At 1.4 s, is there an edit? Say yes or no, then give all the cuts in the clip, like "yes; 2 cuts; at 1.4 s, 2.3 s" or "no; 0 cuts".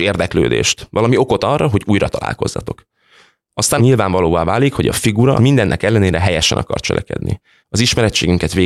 no; 3 cuts; at 3.8 s, 5.4 s, 7.6 s